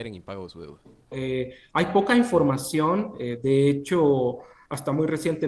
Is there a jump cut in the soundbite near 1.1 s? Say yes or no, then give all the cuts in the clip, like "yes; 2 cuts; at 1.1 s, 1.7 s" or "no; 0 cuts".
yes; 1 cut; at 1.1 s